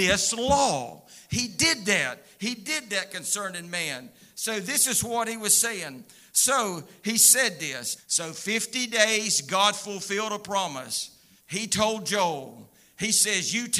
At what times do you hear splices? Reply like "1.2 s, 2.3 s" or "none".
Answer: 8.0 s, 11.4 s